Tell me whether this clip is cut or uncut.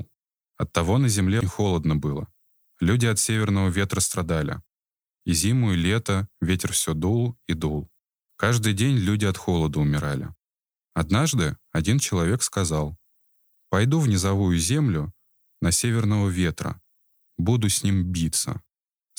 cut